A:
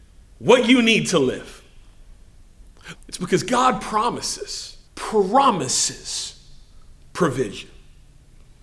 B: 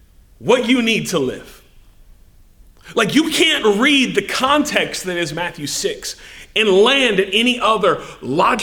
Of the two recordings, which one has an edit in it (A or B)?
A